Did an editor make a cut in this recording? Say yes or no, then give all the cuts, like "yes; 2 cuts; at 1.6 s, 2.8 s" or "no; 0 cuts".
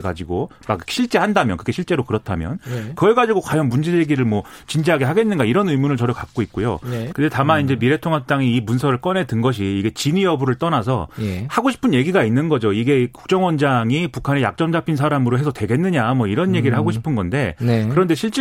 yes; 1 cut; at 7.1 s